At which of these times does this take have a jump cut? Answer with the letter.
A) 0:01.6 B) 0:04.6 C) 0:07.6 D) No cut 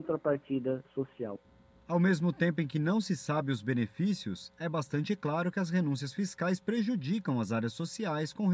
D